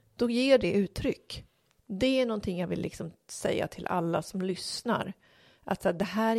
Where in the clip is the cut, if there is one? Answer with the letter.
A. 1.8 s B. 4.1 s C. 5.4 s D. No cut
A